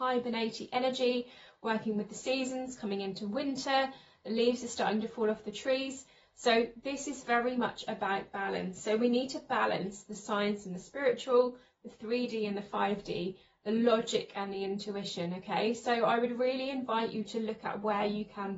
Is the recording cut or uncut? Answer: uncut